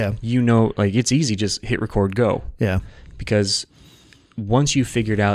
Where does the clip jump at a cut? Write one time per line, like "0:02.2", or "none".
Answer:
none